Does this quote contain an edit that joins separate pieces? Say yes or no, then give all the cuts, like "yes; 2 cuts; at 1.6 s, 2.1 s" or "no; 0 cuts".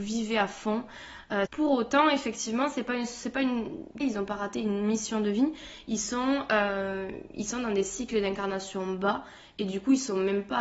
yes; 2 cuts; at 1.5 s, 4.0 s